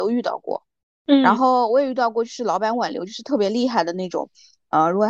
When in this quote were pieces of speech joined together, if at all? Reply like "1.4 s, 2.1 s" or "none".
none